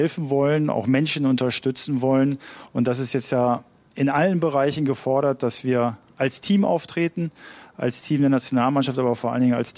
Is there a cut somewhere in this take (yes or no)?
no